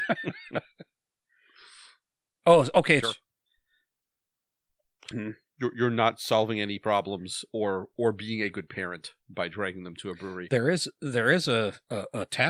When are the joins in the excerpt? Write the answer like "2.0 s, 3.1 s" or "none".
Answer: 3.0 s, 5.1 s